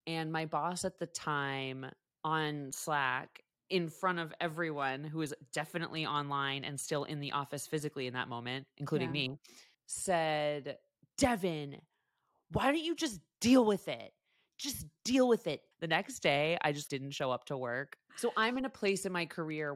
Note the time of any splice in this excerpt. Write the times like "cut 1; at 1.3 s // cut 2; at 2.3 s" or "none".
cut 1; at 15.7 s // cut 2; at 16.9 s // cut 3; at 18.1 s